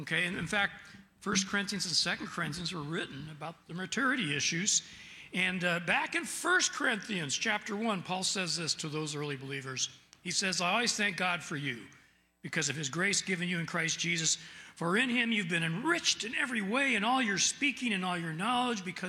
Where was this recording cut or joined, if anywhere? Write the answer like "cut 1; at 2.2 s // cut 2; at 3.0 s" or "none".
none